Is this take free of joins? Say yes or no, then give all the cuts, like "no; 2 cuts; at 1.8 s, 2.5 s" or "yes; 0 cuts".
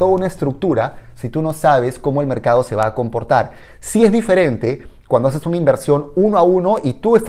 yes; 0 cuts